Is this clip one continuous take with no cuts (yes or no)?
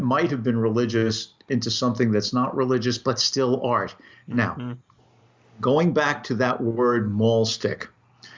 yes